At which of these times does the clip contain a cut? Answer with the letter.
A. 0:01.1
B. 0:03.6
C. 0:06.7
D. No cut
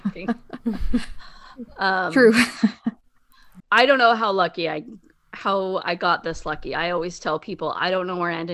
B